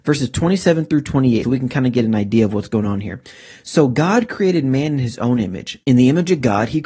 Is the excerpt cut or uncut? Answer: cut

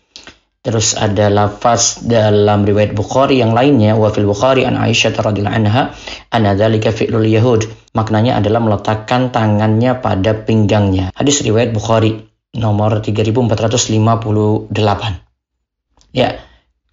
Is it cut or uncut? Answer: cut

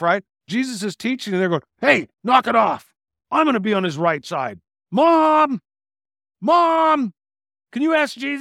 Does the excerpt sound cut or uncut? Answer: uncut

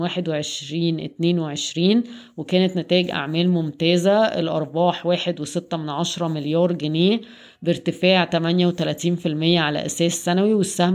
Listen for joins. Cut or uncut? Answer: uncut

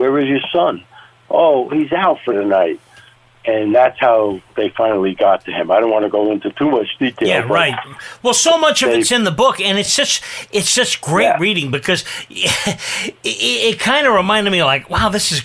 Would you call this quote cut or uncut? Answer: uncut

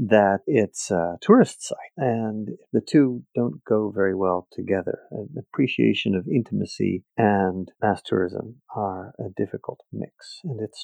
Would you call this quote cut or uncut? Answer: cut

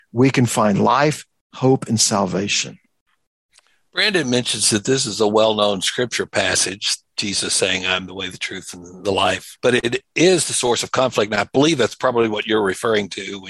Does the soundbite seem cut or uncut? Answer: cut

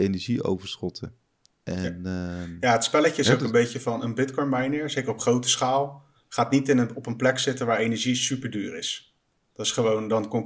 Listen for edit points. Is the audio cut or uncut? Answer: uncut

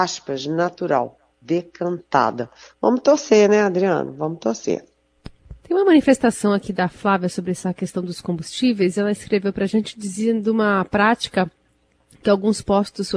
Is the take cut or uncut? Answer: cut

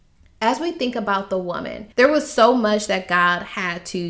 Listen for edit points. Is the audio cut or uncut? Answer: cut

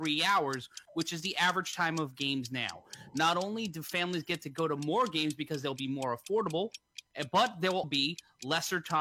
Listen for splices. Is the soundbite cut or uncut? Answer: cut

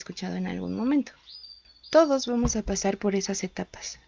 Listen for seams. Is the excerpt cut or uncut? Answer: uncut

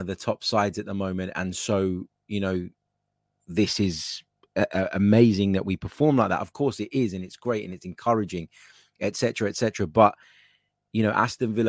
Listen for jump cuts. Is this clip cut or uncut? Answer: uncut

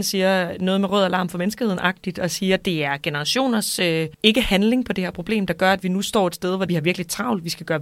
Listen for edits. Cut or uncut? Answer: uncut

